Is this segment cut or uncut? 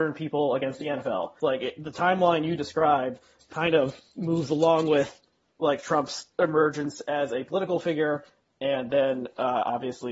cut